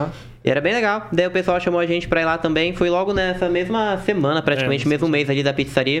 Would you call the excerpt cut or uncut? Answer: uncut